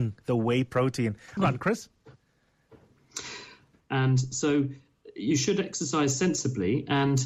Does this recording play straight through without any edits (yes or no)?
no